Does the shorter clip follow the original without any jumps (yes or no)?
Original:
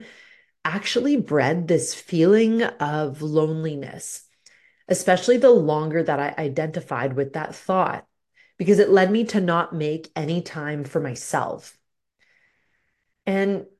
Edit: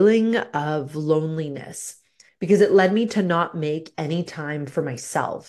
no